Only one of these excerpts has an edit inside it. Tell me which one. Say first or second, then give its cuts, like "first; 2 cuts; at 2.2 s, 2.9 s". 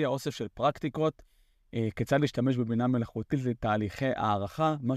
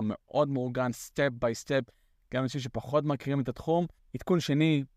second; 1 cut; at 4.0 s